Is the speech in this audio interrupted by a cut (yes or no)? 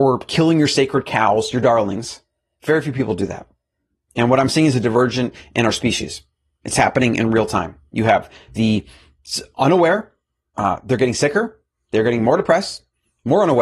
no